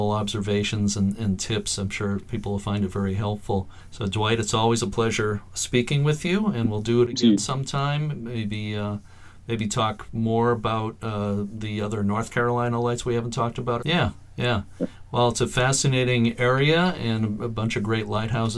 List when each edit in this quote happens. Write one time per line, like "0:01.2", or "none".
0:13.8